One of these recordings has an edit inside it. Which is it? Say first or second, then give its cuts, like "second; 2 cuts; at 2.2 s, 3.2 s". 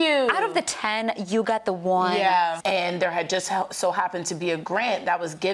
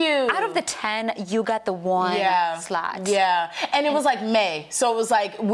first; 1 cut; at 2.6 s